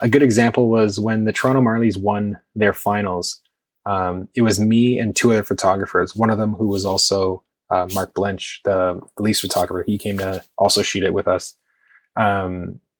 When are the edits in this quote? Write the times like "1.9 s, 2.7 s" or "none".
none